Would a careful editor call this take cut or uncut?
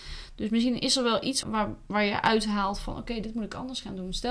cut